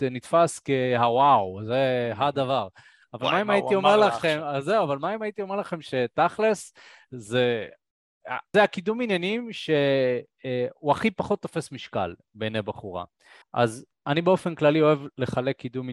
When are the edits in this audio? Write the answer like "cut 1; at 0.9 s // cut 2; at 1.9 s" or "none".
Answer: cut 1; at 8.5 s // cut 2; at 13.4 s